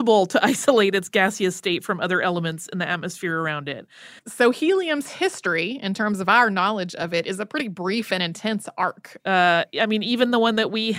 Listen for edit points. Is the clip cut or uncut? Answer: cut